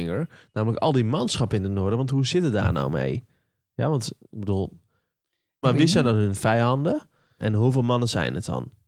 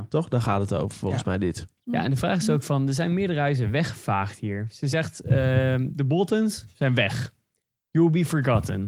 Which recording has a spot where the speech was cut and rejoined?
first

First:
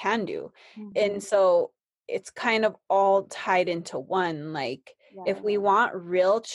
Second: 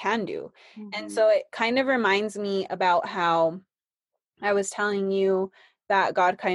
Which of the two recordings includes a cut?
first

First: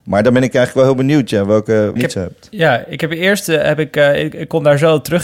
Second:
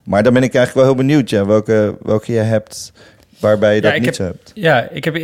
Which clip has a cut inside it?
first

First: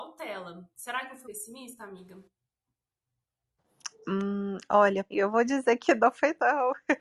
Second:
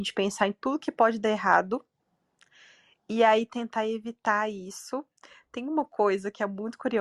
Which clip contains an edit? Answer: first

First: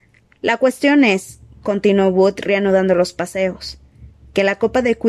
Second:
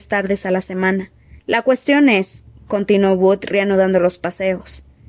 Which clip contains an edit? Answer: second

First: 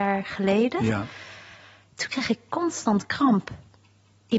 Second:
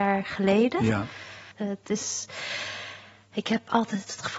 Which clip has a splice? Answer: second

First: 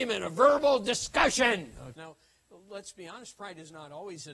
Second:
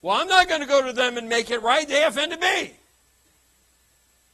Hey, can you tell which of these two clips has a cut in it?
first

